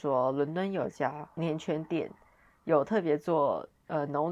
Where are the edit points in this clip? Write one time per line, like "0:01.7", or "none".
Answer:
0:01.4